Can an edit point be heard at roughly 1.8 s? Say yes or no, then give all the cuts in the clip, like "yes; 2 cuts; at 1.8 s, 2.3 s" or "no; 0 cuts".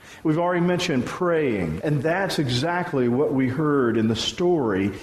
yes; 1 cut; at 1.8 s